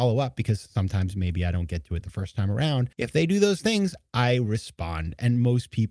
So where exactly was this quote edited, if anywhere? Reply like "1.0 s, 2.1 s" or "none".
2.9 s